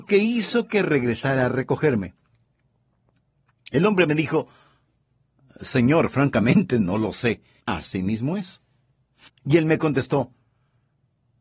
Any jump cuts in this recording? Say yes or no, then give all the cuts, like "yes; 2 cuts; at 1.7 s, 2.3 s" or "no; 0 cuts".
yes; 2 cuts; at 7.6 s, 9.3 s